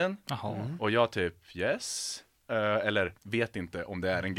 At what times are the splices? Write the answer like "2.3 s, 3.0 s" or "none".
3.2 s